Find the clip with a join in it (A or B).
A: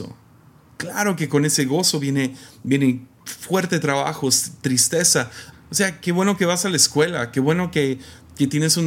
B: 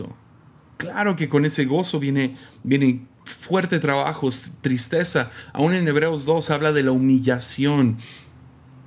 A